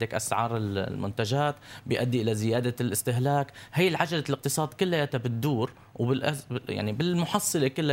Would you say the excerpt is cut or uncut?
uncut